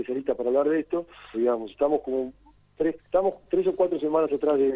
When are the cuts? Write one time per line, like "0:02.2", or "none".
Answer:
0:01.3
0:03.0